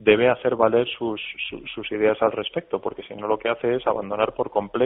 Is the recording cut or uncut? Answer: uncut